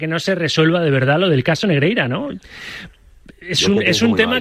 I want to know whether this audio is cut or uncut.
uncut